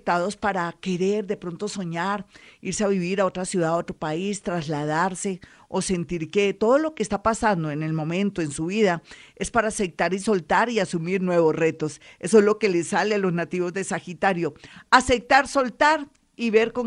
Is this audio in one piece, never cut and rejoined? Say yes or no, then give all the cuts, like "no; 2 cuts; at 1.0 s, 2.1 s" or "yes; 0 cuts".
yes; 0 cuts